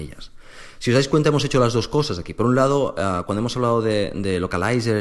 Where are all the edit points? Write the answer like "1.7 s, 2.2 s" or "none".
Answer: none